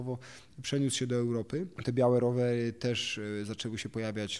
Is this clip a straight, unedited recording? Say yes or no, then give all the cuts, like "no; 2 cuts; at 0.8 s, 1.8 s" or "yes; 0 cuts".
yes; 0 cuts